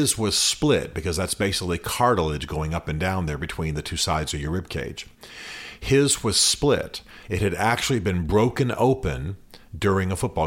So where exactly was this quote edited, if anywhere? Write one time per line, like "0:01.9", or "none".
none

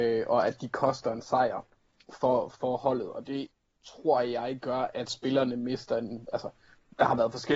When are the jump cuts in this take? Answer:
none

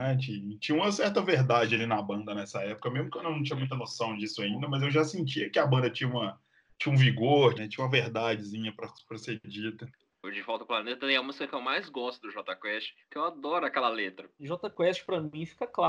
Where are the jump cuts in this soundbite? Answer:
0:07.5
0:13.0

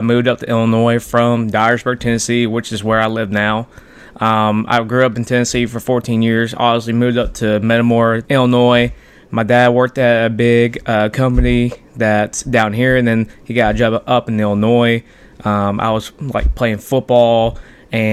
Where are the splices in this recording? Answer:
0:08.2

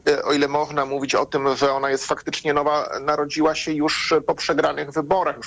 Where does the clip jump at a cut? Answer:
none

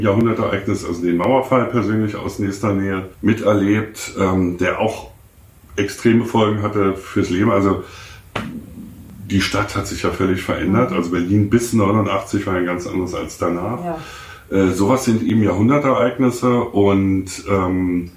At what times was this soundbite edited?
0:03.1

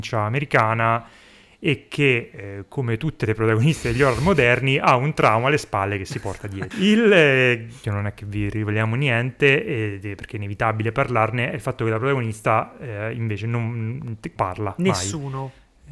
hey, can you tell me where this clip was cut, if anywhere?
0:06.7
0:07.8
0:14.4

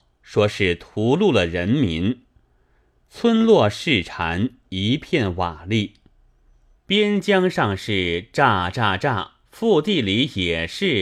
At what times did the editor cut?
0:06.7
0:09.4

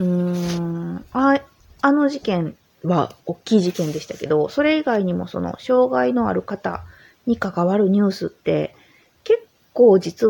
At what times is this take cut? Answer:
none

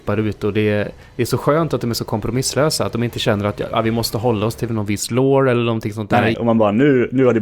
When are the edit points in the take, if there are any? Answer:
0:06.3

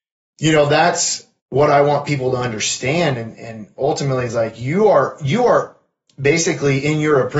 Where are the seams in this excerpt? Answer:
0:01.4

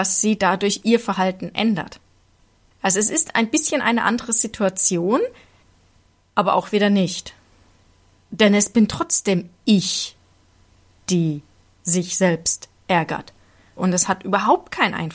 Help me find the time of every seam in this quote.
0:13.8

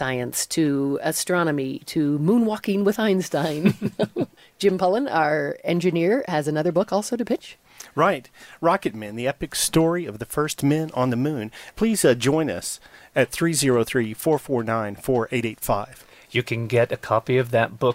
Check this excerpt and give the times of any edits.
0:11.7

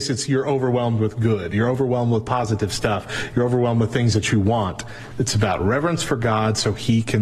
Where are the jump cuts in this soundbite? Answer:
0:05.1

